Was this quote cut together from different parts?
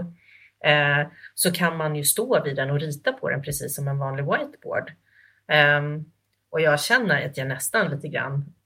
no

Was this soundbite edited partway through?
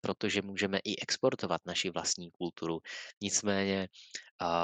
yes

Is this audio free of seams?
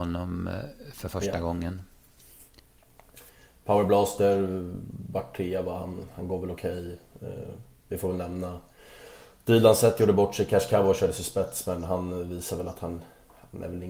yes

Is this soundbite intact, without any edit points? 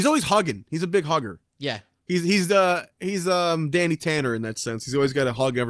no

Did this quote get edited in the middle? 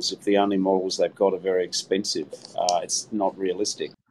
no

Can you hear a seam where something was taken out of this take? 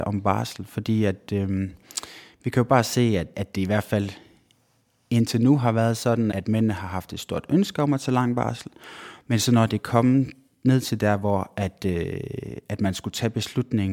yes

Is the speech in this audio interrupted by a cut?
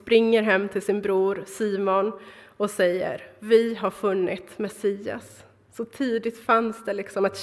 no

